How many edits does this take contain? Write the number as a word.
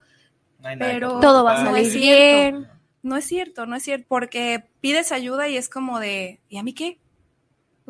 one